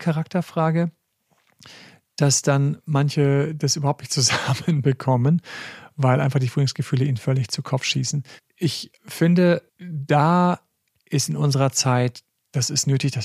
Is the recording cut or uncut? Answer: cut